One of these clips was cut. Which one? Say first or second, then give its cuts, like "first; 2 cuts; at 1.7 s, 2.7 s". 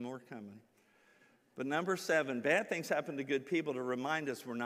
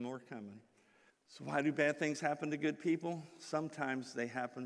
second; 1 cut; at 1.1 s